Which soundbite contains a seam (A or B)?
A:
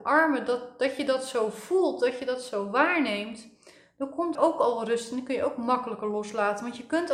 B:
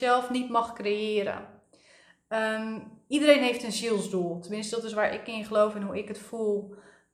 A